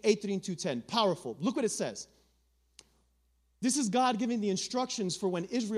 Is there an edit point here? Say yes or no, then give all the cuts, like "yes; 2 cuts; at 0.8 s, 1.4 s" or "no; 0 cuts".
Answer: no; 0 cuts